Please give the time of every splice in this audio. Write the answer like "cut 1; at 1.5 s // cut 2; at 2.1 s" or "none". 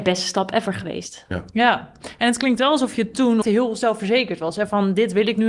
cut 1; at 3.4 s